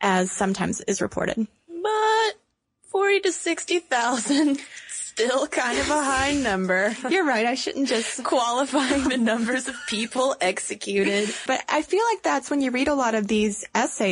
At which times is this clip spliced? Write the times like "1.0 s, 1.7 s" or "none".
11.5 s